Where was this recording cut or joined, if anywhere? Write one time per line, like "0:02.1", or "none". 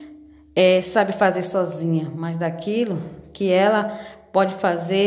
none